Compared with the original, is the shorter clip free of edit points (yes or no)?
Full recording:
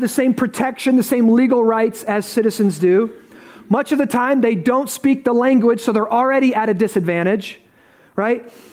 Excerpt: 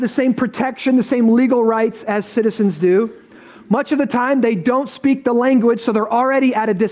yes